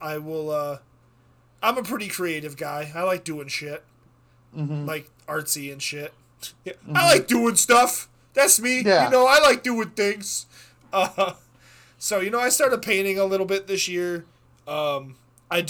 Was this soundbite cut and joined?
no; 0 cuts

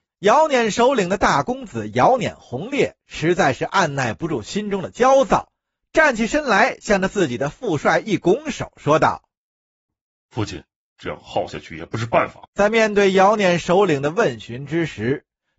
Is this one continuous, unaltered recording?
no; 2 cuts; at 10.9 s, 12.4 s

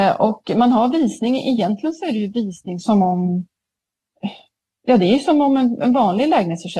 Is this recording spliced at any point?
yes; 1 cut; at 2.8 s

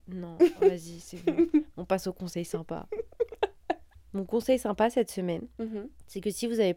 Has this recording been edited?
no; 0 cuts

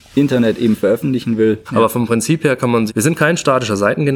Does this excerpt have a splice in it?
yes; 2 cuts; at 1.7 s, 2.9 s

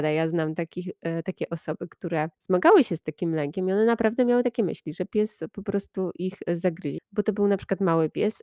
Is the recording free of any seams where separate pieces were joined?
no; 2 cuts; at 2.3 s, 7.0 s

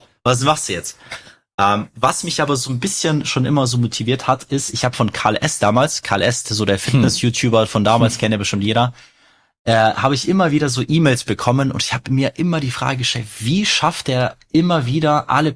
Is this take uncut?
yes; 0 cuts

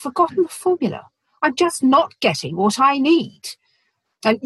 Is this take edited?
no; 0 cuts

